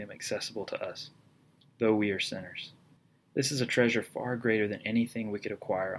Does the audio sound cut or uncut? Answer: uncut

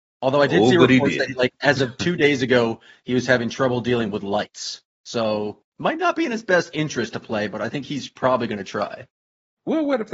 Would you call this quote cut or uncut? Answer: cut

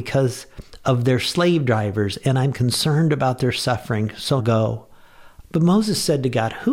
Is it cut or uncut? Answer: cut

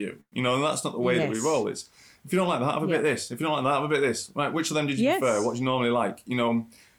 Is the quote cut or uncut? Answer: uncut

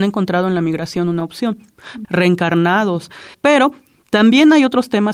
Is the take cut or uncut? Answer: cut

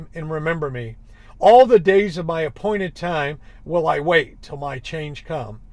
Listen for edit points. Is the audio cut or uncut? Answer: cut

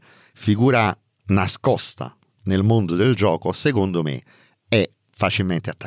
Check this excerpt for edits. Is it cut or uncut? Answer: uncut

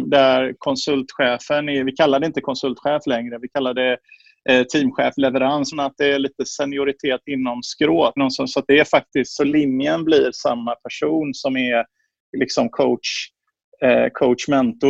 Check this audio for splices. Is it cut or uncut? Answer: cut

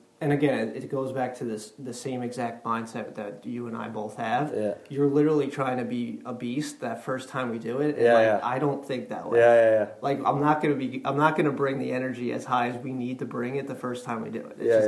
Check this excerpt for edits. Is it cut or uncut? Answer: uncut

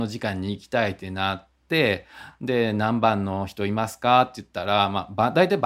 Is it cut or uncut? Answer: uncut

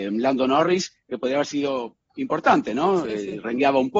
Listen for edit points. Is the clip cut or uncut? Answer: uncut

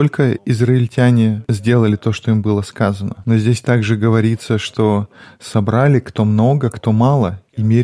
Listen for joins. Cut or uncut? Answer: uncut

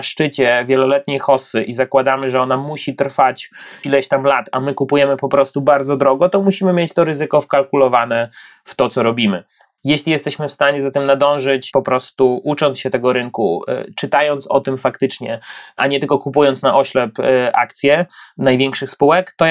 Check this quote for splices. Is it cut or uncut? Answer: cut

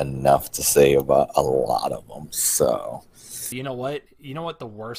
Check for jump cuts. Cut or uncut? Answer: cut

